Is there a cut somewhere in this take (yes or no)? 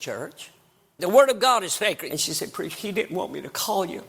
yes